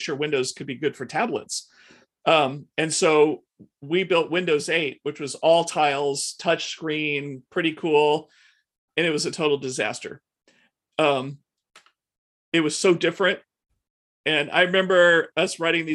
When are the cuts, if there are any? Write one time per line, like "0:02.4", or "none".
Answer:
none